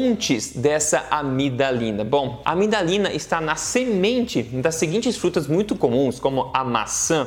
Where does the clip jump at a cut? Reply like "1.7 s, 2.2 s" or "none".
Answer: none